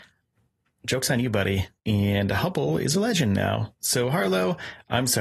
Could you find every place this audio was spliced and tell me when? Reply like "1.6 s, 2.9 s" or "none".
1.8 s